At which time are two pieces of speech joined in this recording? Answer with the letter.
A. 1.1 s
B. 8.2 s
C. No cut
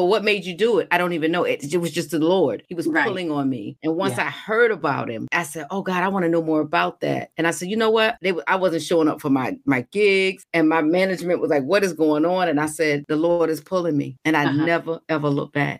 B